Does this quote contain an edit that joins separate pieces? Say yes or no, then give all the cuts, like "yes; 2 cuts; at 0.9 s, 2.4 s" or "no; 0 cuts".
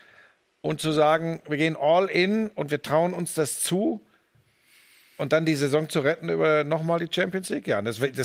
no; 0 cuts